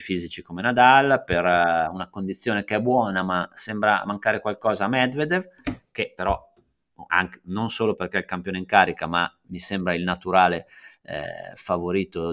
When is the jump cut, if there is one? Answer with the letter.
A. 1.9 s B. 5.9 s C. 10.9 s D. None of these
D